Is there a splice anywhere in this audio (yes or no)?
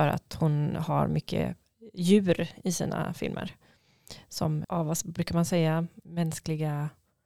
yes